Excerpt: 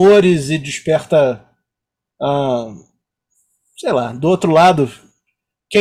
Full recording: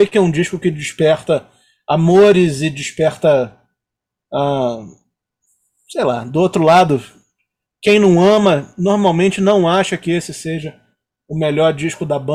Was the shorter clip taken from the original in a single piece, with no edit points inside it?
yes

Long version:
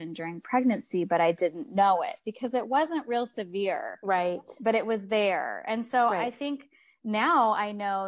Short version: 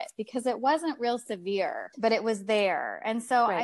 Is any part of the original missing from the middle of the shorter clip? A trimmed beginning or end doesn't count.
yes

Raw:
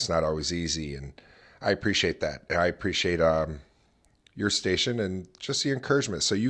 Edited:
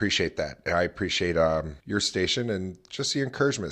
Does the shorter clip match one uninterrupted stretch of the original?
no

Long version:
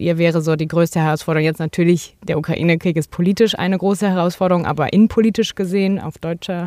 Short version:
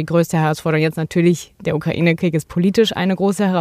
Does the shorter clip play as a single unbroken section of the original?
yes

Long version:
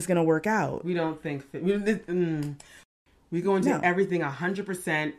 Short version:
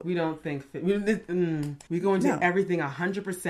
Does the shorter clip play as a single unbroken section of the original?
no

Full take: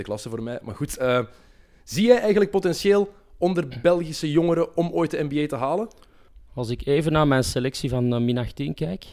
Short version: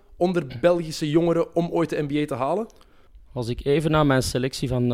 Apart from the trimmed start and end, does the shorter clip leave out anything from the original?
no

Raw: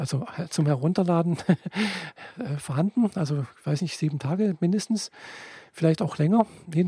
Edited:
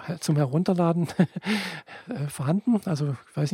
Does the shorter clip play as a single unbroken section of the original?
yes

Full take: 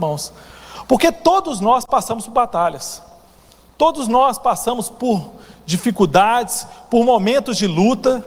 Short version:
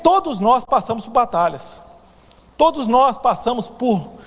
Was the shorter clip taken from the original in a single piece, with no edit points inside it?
yes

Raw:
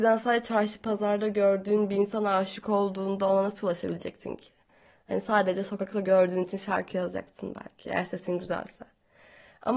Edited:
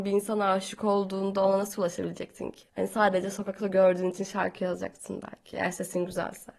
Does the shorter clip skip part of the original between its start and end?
yes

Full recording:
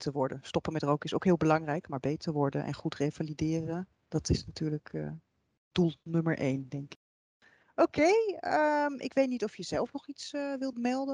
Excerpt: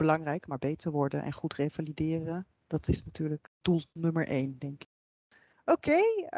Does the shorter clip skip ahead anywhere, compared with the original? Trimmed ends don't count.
yes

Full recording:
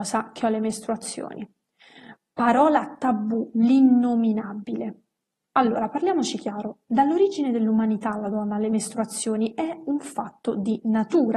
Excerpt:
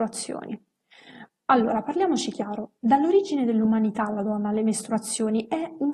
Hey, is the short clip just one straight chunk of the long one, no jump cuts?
no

